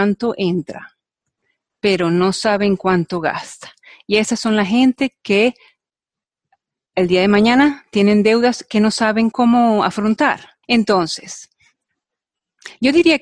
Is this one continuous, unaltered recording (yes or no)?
no